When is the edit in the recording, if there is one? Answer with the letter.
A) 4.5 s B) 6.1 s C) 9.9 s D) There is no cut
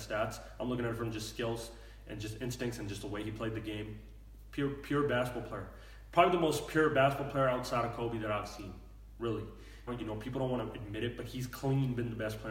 C